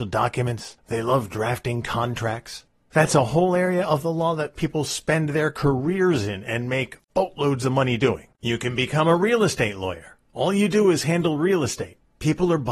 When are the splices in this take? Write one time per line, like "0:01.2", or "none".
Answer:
0:08.3